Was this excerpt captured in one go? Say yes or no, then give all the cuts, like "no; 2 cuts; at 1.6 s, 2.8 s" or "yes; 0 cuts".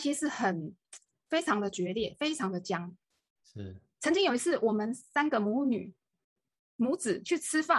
yes; 0 cuts